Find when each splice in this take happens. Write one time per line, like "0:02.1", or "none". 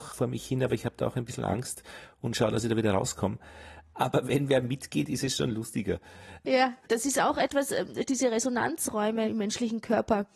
0:06.4